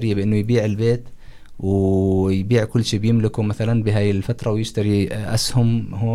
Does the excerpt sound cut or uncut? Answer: uncut